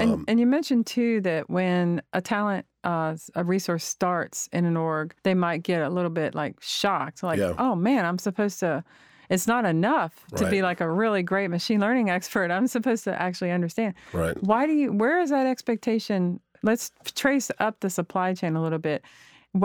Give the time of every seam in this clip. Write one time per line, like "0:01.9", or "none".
0:05.2